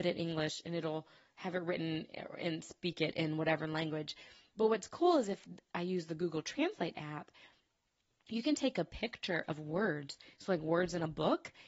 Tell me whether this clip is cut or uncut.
uncut